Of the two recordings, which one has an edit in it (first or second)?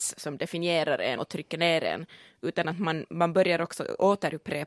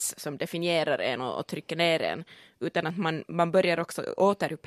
first